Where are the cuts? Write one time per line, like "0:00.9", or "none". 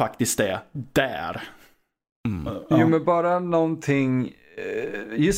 none